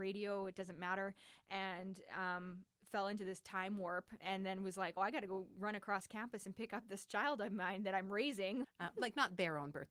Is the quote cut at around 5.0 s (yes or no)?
yes